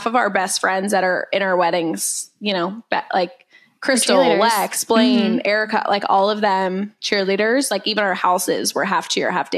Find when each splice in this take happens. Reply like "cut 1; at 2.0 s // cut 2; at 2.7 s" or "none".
none